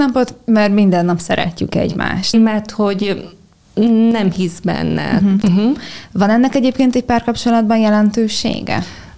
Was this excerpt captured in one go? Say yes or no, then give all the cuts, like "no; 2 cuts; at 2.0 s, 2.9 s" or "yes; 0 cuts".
no; 2 cuts; at 2.3 s, 5.4 s